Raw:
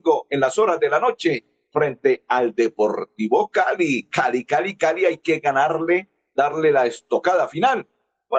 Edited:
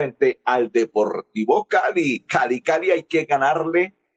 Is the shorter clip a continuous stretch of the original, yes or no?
no